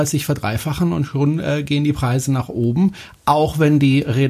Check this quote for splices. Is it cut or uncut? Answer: uncut